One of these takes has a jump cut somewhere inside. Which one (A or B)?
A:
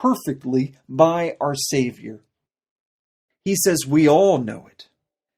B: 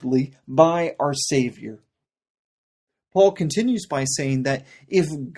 A